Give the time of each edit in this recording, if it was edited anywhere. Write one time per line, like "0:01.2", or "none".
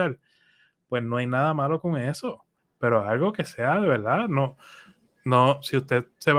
0:02.6